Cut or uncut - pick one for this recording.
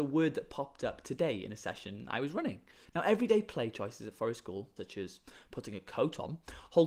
cut